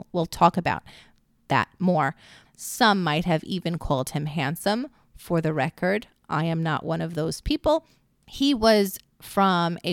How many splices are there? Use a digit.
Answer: 1